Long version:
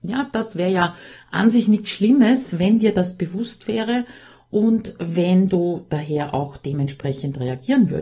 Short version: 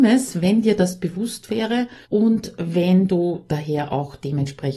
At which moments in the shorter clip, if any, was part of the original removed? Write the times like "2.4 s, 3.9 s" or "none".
2.0 s